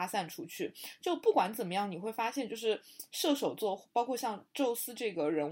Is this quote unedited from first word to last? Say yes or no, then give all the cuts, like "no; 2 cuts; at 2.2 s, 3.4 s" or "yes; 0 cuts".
yes; 0 cuts